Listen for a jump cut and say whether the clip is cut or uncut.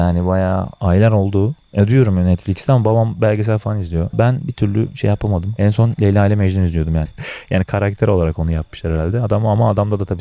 cut